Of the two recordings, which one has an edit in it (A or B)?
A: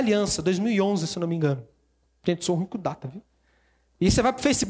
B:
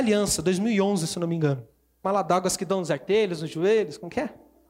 B